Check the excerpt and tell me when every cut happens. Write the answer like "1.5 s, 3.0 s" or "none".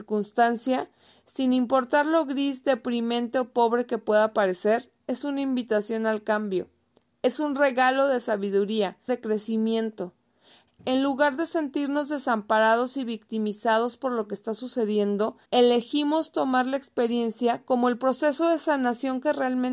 9.1 s, 10.7 s, 15.5 s